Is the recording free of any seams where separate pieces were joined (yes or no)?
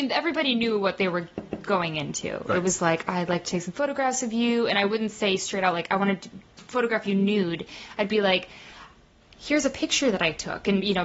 yes